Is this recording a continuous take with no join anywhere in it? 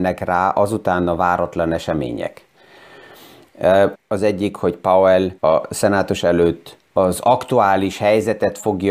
no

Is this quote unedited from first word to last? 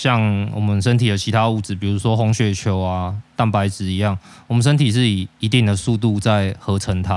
yes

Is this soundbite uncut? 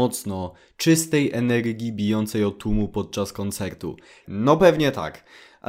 no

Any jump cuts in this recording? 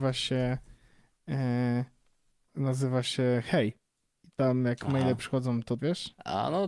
yes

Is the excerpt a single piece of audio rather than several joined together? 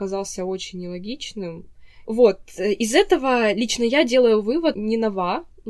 no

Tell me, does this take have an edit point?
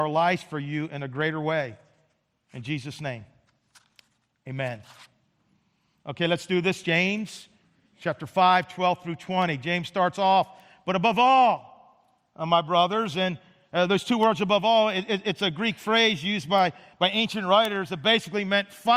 no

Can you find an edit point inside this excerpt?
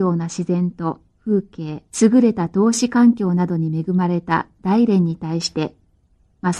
yes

